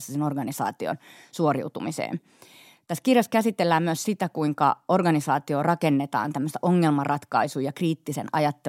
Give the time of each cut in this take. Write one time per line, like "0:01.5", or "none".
none